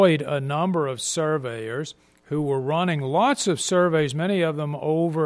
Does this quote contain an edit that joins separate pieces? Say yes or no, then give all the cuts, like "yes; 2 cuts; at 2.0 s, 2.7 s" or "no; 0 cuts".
no; 0 cuts